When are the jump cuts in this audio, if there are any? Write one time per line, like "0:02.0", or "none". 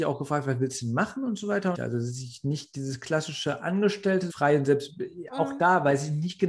0:01.7
0:04.3

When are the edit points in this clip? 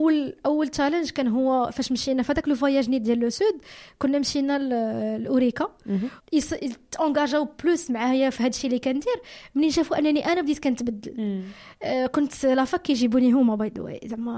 0:06.2

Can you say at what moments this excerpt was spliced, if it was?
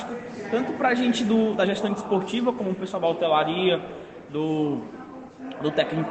none

